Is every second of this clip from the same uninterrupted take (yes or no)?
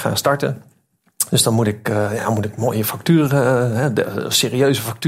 yes